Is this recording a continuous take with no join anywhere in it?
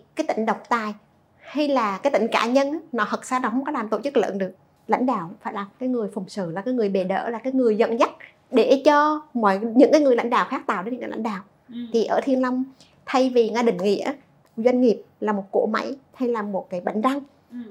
yes; 0 cuts

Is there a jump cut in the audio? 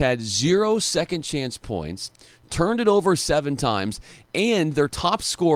no; 0 cuts

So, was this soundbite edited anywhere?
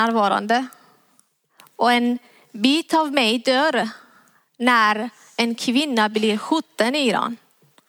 no; 0 cuts

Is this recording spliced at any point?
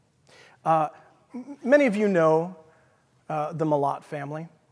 no; 0 cuts

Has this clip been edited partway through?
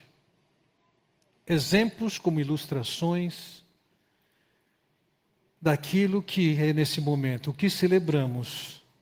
yes; 1 cut; at 1.3 s

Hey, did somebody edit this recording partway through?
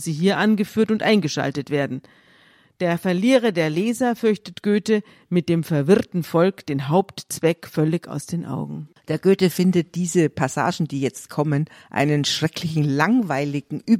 no; 0 cuts

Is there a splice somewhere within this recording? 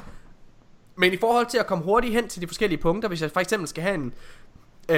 no; 0 cuts

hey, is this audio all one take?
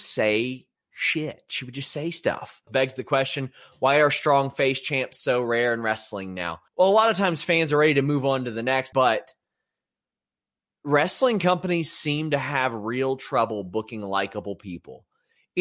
no; 3 cuts; at 2.7 s, 6.7 s, 8.9 s

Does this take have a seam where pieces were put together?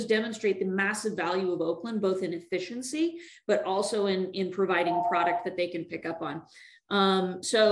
no; 0 cuts

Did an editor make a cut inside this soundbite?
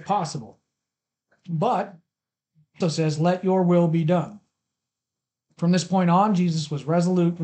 yes; 1 cut; at 2.8 s

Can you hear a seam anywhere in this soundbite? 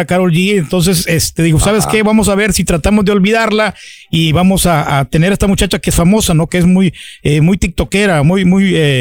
no; 0 cuts

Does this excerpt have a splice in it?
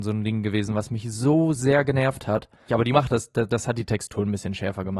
yes; 1 cut; at 2.7 s

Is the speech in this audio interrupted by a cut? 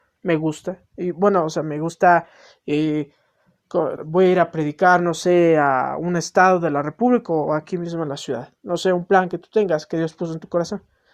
yes; 1 cut; at 4.0 s

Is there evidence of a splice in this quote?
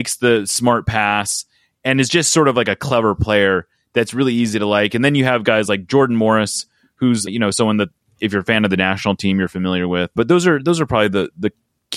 no; 0 cuts

